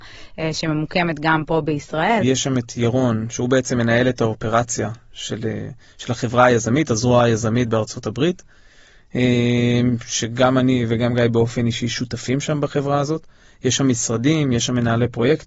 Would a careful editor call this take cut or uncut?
cut